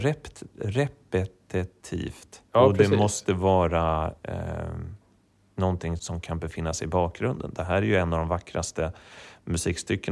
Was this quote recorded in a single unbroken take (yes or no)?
no